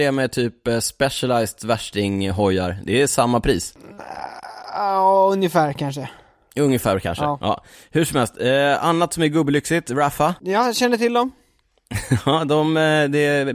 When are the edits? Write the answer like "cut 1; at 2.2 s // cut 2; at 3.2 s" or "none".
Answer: none